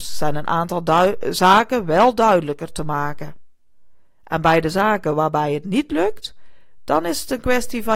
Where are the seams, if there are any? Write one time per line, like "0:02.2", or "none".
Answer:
0:04.1